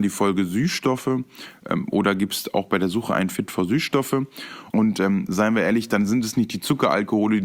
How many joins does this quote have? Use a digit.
1